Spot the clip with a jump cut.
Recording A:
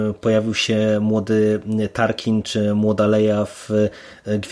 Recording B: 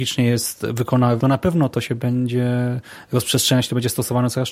B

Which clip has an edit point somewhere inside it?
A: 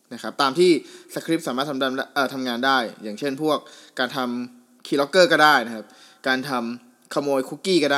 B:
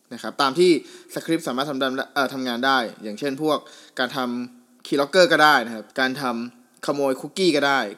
B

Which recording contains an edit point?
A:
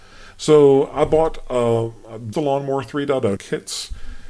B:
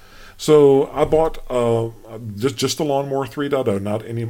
A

